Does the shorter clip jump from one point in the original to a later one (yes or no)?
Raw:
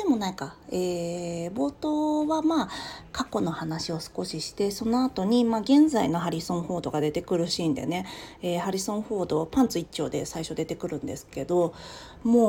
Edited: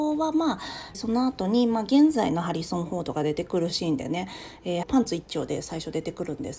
yes